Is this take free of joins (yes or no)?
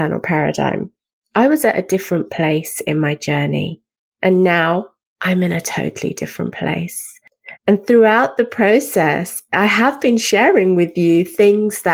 no